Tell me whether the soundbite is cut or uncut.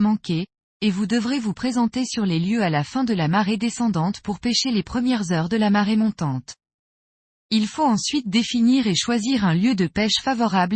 uncut